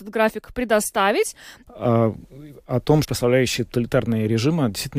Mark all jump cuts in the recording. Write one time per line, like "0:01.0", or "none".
0:01.7
0:03.0